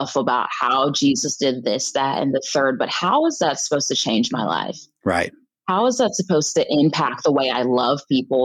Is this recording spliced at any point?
no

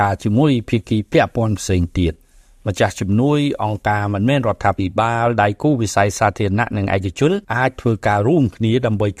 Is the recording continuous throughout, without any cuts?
no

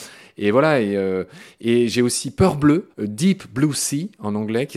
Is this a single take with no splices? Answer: no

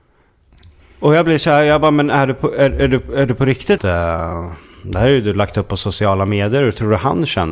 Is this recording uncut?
no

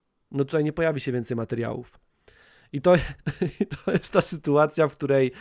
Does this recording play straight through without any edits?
yes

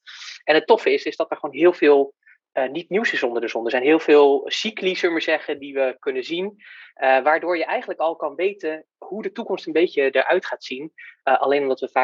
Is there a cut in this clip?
no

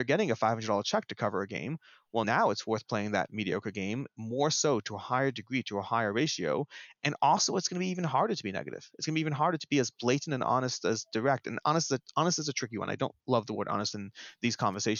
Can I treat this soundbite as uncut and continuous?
yes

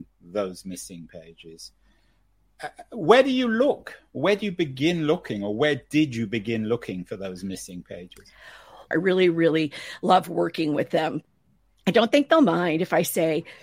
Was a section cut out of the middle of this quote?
yes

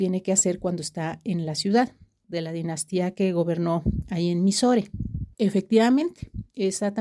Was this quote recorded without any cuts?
no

